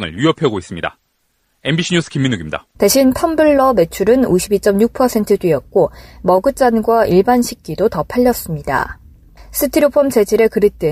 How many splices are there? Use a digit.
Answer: 2